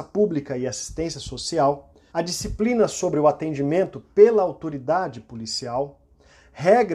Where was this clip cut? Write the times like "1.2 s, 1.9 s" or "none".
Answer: 2.1 s